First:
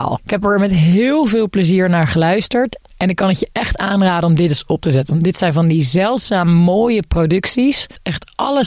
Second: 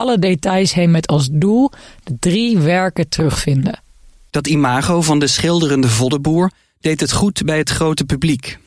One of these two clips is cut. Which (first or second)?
second